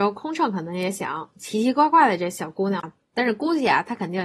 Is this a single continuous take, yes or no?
no